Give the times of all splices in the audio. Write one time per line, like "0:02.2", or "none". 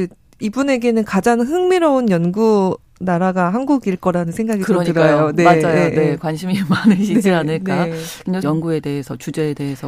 0:08.4